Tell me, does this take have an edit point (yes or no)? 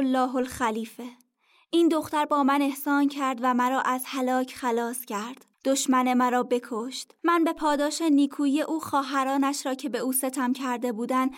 yes